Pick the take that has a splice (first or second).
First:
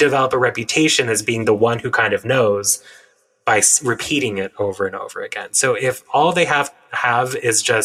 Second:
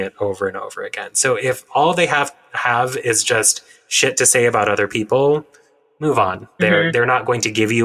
second